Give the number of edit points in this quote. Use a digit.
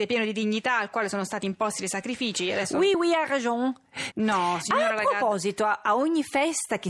2